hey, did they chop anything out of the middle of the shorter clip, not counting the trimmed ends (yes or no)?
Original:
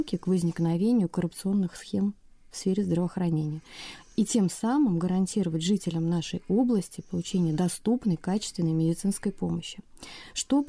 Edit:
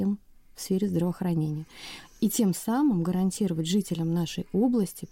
no